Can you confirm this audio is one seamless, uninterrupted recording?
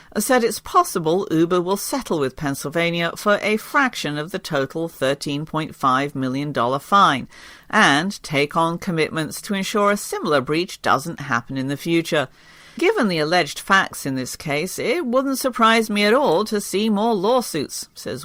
no; 1 cut; at 12.8 s

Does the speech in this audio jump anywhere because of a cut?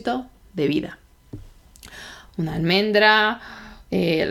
yes; 1 cut; at 2.3 s

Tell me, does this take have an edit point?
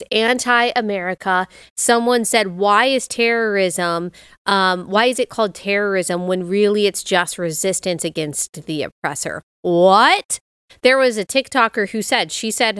yes; 1 cut; at 1.6 s

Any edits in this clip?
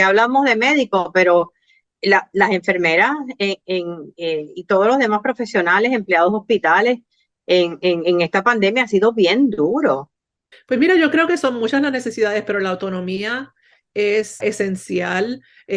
yes; 2 cuts; at 10.5 s, 14.4 s

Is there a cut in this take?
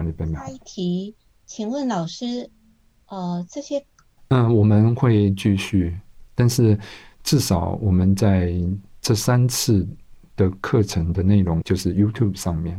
yes; 2 cuts; at 4.2 s, 11.6 s

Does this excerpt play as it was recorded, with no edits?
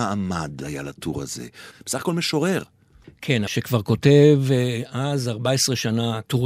no; 1 cut; at 3.5 s

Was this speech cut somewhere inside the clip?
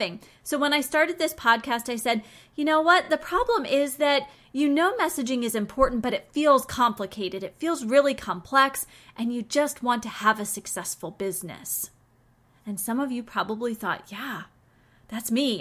no; 0 cuts

